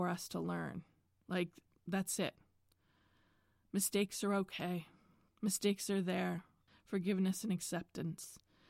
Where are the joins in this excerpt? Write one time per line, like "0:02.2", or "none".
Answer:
0:05.3
0:06.7